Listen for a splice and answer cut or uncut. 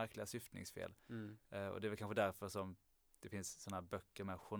uncut